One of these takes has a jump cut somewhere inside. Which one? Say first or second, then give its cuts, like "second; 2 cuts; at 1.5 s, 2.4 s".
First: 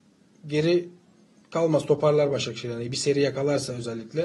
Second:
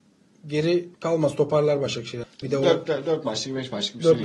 second; 2 cuts; at 0.9 s, 2.2 s